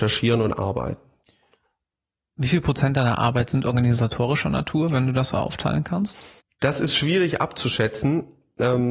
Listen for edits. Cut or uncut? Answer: uncut